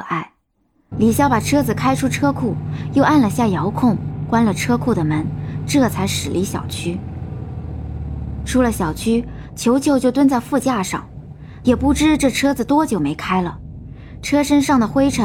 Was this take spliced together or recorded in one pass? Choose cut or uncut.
cut